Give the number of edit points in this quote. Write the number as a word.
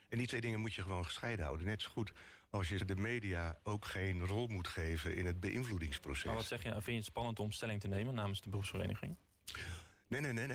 one